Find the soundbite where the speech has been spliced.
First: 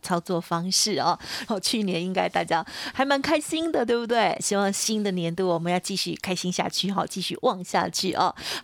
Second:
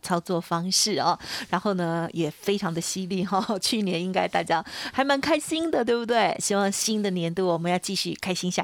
first; 1 cut; at 1.5 s

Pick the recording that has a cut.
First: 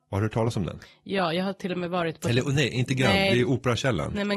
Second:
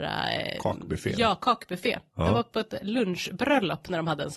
second; 1 cut; at 2.8 s

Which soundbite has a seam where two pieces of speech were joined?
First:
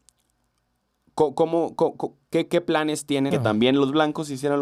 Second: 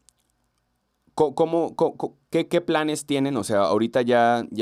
first; 1 cut; at 3.3 s

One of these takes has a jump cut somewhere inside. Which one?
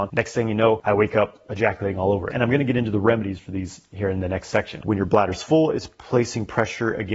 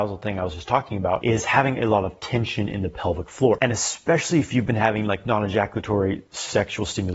first; 2 cuts; at 2.3 s, 4.8 s

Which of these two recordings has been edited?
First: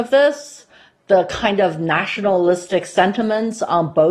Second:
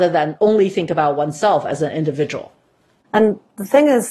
second; 1 cut; at 3.0 s

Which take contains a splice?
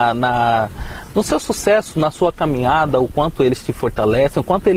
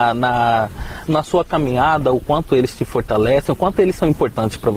second; 1 cut; at 1.1 s

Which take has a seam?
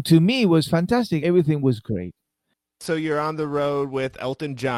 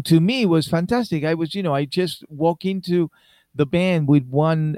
first; 1 cut; at 1.2 s

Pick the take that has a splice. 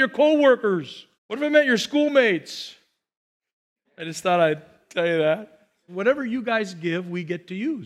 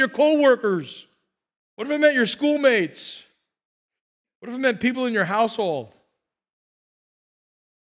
first; 3 cuts; at 1.1 s, 3.8 s, 5.9 s

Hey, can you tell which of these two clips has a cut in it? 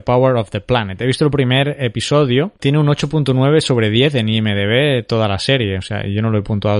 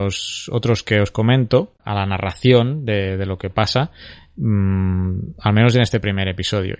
second; 1 cut; at 1.8 s

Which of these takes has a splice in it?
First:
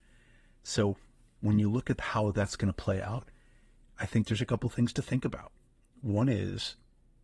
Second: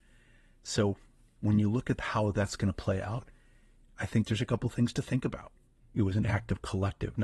second; 1 cut; at 5.8 s

